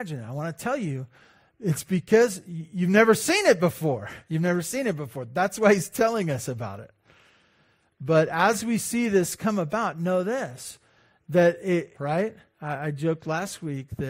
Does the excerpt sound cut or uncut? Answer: cut